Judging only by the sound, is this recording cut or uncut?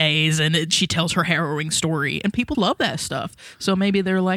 cut